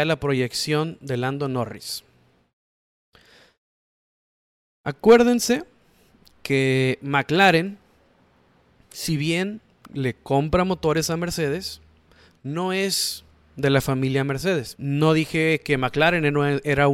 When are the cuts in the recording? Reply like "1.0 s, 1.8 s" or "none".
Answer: 14.8 s